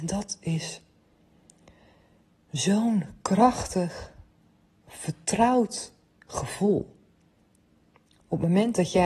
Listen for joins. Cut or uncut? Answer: uncut